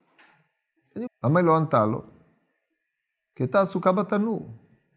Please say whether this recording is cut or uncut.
cut